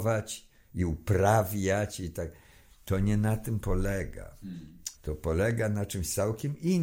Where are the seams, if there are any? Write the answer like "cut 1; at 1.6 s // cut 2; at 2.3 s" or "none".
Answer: cut 1; at 5.0 s